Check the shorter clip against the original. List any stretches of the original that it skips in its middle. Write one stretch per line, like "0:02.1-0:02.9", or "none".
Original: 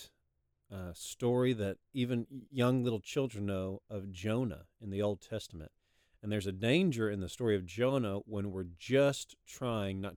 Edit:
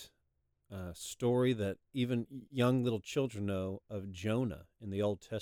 none